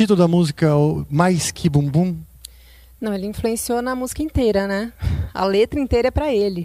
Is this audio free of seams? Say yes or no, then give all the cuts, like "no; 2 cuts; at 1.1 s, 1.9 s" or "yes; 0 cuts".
yes; 0 cuts